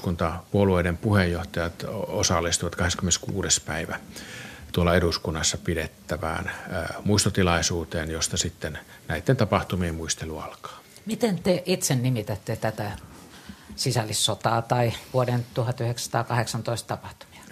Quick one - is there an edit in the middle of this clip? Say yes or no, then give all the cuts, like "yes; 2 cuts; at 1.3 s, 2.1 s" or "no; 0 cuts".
no; 0 cuts